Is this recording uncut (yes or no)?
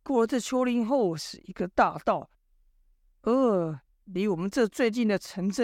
yes